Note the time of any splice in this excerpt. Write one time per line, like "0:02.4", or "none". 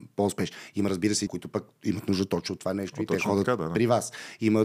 0:01.3